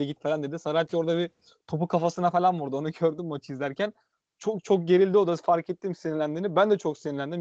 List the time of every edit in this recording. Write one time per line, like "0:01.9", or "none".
none